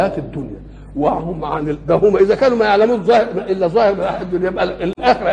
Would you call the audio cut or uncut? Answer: uncut